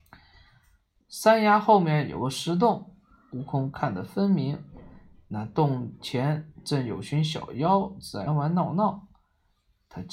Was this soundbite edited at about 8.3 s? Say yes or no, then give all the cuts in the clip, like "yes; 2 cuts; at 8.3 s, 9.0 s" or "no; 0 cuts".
yes; 2 cuts; at 1.0 s, 8.3 s